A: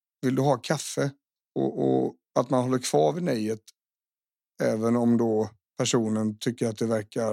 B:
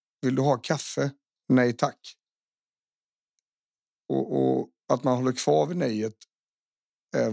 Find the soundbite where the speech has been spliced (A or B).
A